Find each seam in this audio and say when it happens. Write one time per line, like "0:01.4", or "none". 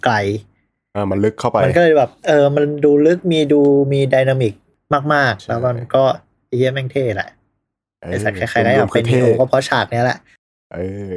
0:00.9